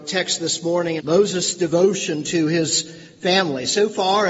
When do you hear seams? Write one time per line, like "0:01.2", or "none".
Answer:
0:01.0